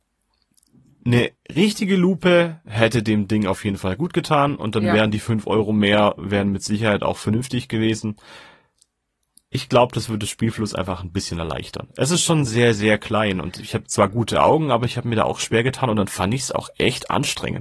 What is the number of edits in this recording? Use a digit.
1